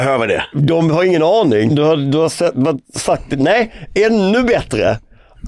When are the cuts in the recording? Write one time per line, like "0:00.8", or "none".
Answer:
0:01.7